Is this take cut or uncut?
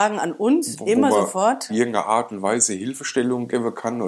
cut